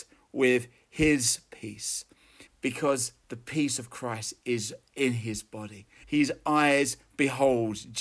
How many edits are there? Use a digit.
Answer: 2